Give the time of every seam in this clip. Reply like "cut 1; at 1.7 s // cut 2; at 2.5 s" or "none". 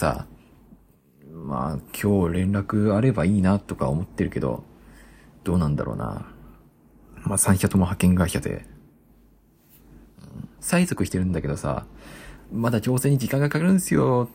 cut 1; at 10.6 s // cut 2; at 12.4 s